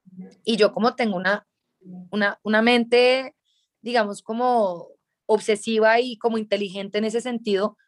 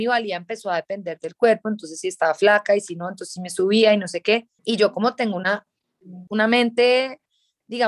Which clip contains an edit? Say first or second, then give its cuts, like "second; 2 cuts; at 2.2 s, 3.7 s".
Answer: second; 2 cuts; at 4.6 s, 6.3 s